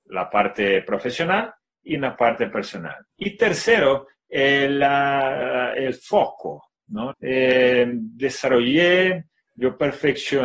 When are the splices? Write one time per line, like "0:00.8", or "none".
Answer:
0:03.1
0:07.1